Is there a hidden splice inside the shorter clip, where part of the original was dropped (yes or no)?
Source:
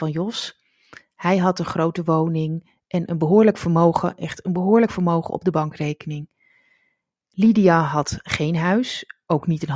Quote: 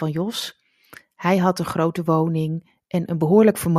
no